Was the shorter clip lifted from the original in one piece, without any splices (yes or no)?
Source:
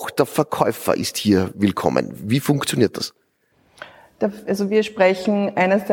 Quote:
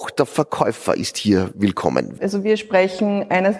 no